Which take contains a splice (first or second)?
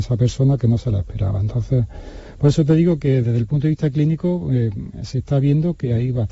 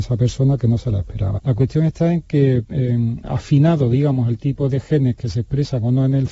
second